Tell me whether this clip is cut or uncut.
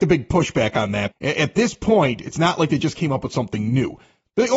cut